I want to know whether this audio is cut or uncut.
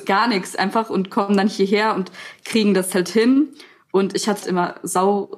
cut